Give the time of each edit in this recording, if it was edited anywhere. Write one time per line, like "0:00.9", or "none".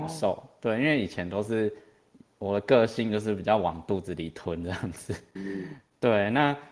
0:05.4